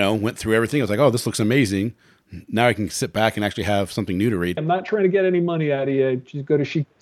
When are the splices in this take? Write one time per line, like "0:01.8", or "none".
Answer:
0:04.6

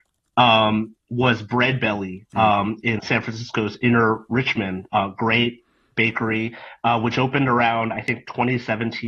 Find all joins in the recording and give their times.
none

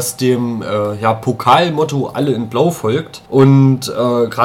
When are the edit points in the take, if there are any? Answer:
0:03.3

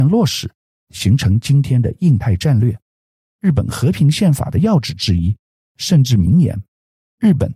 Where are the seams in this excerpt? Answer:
0:03.3
0:05.6

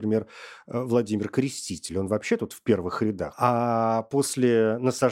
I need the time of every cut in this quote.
0:03.3

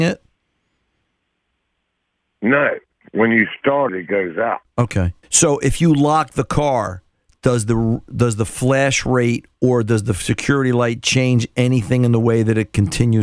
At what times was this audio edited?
0:03.9
0:05.2

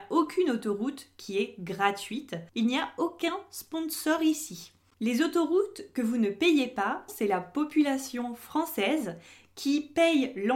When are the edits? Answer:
0:02.5
0:04.9
0:07.1

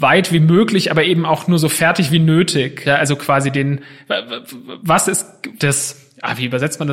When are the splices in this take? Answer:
0:02.8
0:05.6

